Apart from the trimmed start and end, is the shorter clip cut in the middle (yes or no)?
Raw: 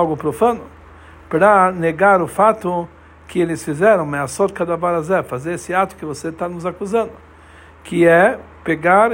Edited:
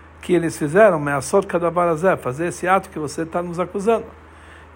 no